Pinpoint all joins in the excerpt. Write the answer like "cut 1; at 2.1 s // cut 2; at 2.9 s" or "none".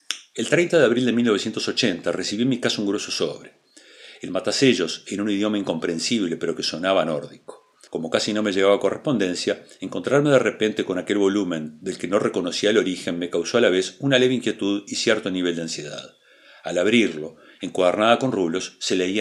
cut 1; at 7.9 s